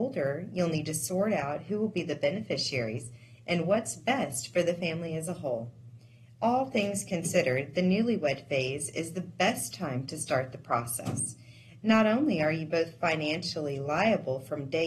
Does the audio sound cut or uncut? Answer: uncut